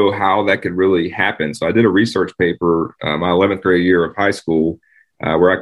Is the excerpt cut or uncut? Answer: uncut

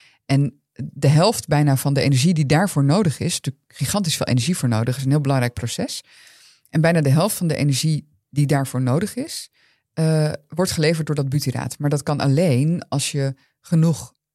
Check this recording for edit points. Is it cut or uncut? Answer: uncut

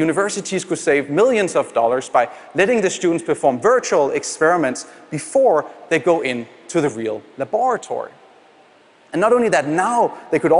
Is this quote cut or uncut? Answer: uncut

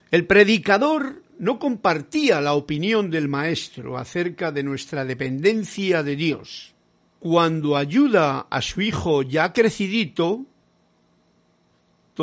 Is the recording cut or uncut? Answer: cut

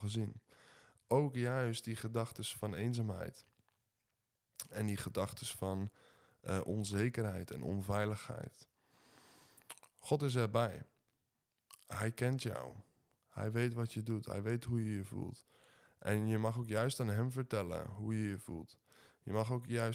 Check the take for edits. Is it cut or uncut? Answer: uncut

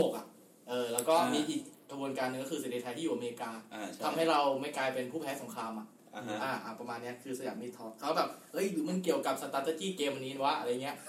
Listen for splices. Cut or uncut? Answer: uncut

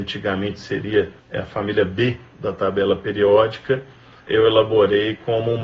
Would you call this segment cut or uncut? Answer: cut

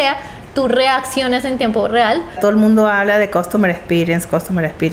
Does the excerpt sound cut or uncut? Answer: cut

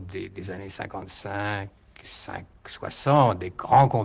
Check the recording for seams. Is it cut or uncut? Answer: cut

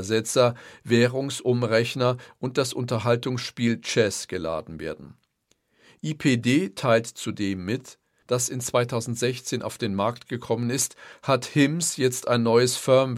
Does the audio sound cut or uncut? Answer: cut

